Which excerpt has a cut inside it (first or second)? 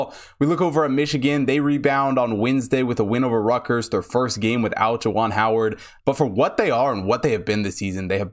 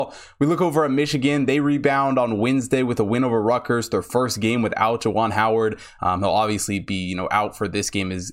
first